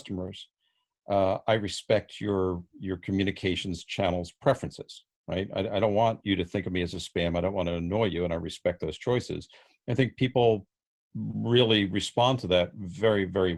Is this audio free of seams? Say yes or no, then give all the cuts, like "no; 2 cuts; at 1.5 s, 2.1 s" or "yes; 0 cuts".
yes; 0 cuts